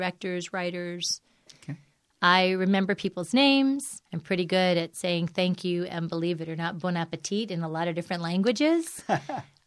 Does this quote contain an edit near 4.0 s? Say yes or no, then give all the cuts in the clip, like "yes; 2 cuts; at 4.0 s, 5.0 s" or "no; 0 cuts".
yes; 2 cuts; at 1.5 s, 4.0 s